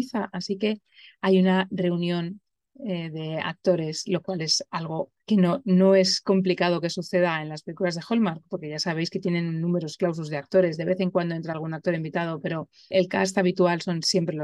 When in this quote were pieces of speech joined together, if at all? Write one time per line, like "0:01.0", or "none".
0:05.2
0:12.9